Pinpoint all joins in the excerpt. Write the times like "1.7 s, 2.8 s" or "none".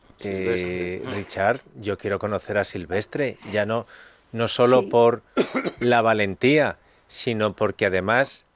none